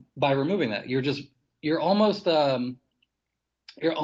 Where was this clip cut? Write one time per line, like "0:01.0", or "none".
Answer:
none